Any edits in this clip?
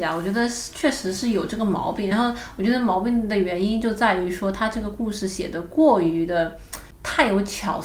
no; 0 cuts

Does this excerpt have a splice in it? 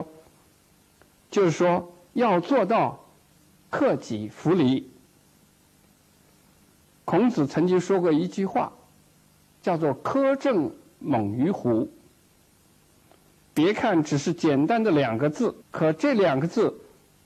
yes; 2 cuts; at 12.6 s, 15.6 s

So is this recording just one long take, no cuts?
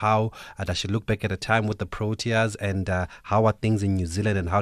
yes; 0 cuts

